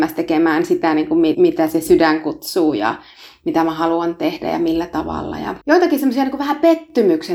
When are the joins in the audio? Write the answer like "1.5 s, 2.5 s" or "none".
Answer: 1.3 s, 5.6 s